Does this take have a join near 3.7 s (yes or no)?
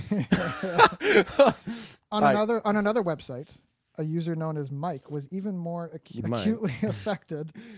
no